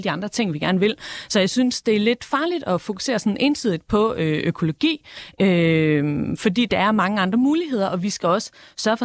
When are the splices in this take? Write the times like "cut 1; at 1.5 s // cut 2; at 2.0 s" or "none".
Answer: none